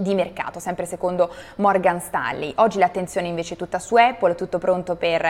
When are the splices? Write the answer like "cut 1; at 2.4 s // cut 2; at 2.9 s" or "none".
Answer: none